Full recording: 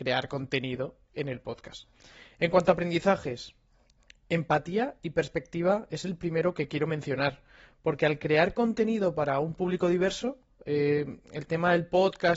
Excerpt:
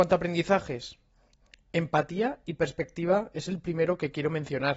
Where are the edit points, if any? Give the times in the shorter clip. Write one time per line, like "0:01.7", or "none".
none